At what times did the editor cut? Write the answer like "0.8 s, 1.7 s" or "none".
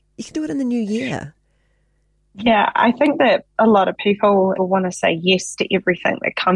4.6 s